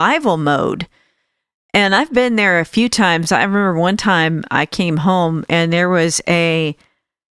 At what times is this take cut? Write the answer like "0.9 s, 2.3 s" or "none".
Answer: none